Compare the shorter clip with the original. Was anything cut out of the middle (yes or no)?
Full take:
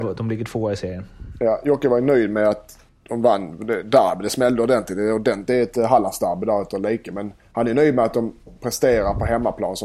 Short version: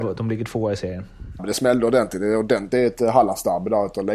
yes